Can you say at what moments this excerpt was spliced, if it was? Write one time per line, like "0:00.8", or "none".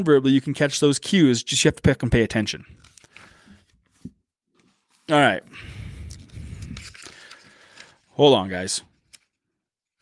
none

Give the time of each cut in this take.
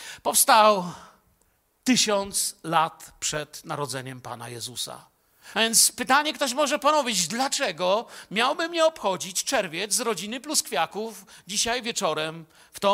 0:05.5

